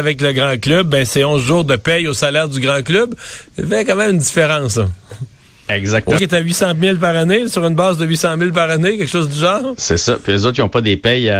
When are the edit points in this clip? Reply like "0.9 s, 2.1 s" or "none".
6.2 s